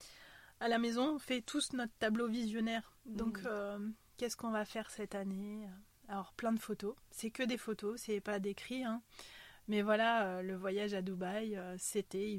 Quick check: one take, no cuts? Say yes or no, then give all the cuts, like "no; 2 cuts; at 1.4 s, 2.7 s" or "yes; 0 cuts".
yes; 0 cuts